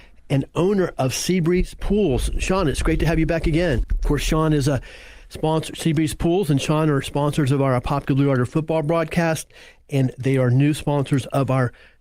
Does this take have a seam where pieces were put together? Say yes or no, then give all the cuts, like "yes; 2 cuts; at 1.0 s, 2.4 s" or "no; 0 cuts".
yes; 1 cut; at 3.8 s